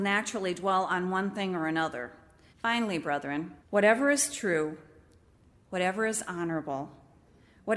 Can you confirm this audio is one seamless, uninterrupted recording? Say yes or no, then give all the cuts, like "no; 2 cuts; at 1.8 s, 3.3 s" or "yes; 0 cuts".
no; 2 cuts; at 2.5 s, 3.6 s